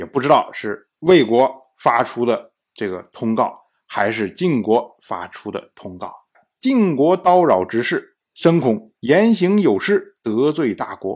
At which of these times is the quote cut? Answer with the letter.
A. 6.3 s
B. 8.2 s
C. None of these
A